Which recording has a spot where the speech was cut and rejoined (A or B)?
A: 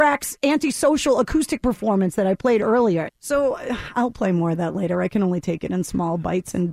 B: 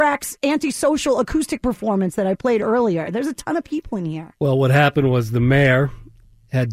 A